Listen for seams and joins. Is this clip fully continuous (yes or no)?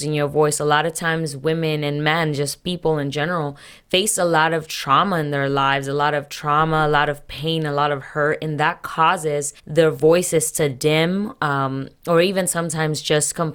no